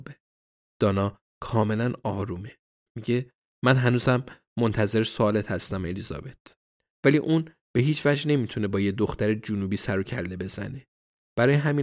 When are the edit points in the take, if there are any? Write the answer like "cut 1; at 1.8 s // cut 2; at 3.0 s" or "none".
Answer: cut 1; at 2.9 s // cut 2; at 6.9 s